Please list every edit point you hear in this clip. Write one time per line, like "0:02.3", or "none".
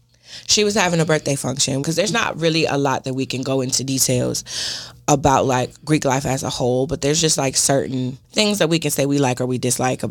0:01.8
0:08.2